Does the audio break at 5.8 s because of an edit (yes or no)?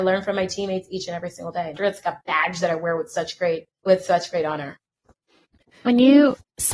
no